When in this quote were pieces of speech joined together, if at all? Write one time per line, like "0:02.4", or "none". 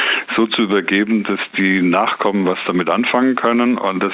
none

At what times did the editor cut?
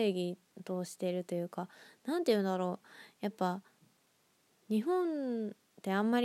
none

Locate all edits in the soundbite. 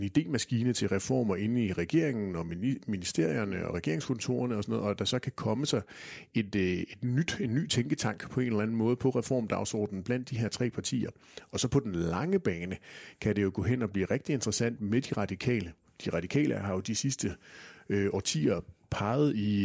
none

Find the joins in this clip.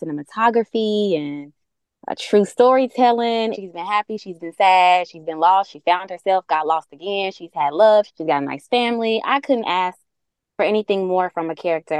0:03.5
0:08.1

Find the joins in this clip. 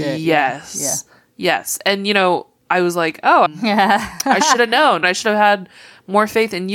0:03.5
0:05.0

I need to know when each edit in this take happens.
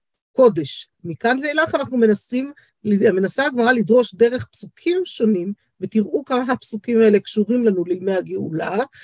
0:01.0

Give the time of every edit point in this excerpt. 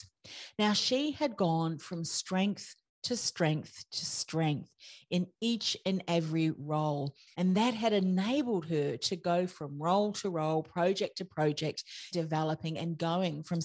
0:07.3
0:12.1

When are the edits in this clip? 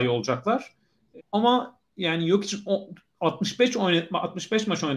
0:01.2

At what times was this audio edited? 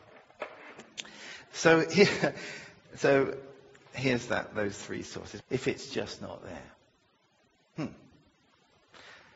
0:05.4

